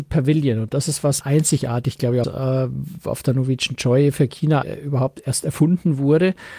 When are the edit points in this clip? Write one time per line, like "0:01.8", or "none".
0:01.2
0:02.2
0:04.6